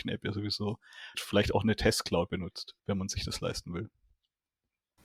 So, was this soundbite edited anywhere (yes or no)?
yes